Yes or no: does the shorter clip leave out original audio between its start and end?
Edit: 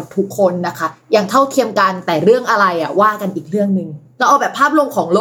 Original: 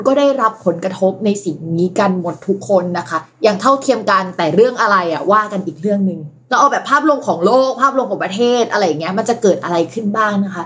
no